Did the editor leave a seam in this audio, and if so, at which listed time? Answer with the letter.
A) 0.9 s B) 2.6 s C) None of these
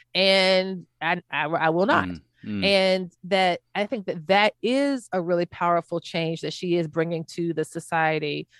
C